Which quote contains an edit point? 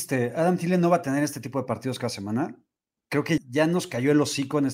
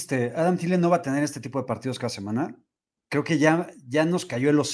first; 1 cut; at 3.4 s

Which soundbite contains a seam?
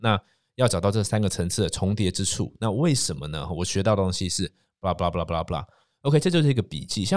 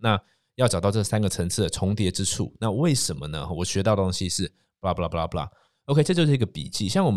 second; 1 cut; at 5.0 s

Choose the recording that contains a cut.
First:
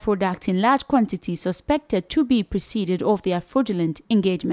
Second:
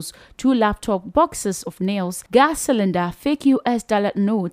second; 1 cut; at 2.3 s

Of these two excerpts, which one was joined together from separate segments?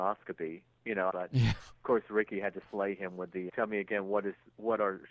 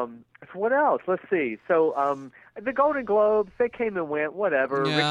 first; 2 cuts; at 1.1 s, 3.5 s

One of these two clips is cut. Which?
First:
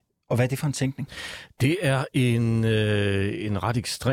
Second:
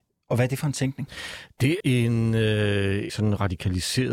second; 2 cuts; at 1.8 s, 3.1 s

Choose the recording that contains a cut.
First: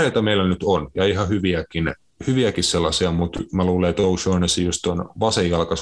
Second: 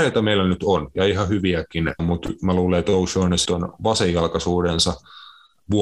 second; 2 cuts; at 2.0 s, 3.5 s

